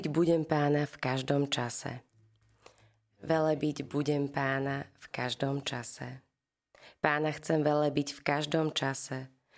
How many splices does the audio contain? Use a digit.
0